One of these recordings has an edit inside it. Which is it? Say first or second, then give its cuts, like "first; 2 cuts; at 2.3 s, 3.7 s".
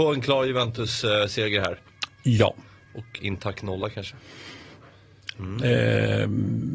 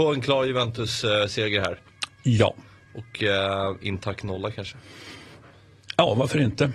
first; 2 cuts; at 3.2 s, 5.3 s